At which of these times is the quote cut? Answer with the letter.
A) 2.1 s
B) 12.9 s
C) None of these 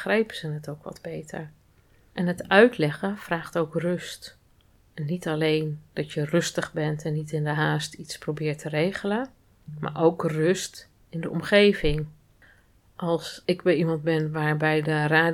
C